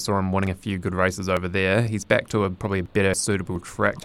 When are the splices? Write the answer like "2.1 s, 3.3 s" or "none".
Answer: none